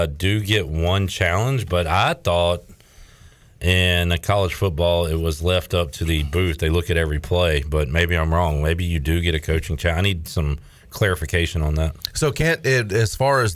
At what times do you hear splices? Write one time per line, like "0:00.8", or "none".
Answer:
none